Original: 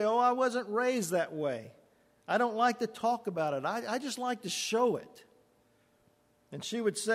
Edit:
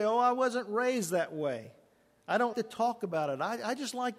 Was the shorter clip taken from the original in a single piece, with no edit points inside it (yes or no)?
no